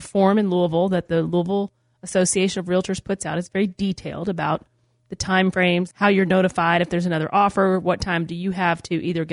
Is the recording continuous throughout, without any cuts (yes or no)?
no